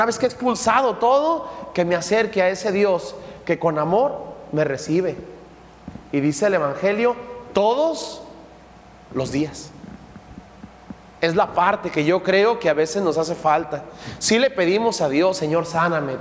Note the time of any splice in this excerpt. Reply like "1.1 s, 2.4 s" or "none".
none